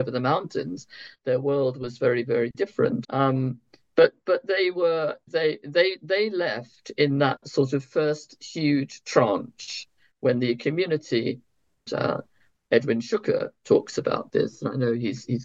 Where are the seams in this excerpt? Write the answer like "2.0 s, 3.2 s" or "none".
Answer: 3.0 s, 5.3 s, 11.9 s